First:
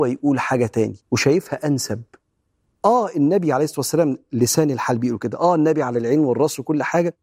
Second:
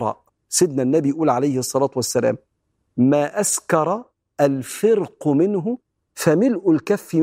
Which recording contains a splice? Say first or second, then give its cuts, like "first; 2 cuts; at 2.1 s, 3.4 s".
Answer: first; 1 cut; at 1.0 s